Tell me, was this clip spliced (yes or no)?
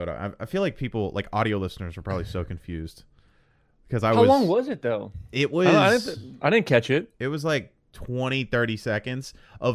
no